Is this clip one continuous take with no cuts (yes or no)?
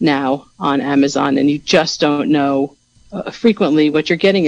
yes